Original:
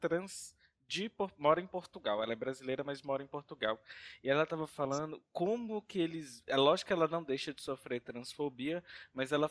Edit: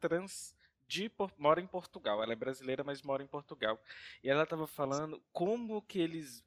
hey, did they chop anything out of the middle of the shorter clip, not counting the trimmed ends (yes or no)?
no